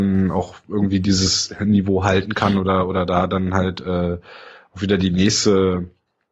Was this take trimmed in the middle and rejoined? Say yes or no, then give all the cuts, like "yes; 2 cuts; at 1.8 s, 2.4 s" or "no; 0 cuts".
no; 0 cuts